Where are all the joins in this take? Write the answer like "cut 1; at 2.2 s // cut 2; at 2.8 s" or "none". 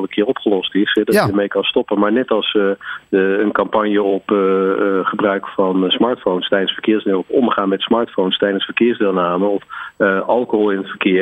none